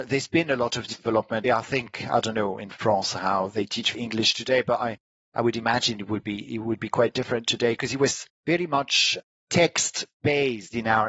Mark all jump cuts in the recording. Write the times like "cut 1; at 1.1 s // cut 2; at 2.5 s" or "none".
cut 1; at 1.4 s